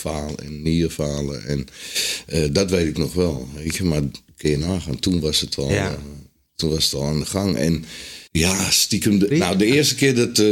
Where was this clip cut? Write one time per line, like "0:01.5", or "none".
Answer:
0:08.3
0:09.3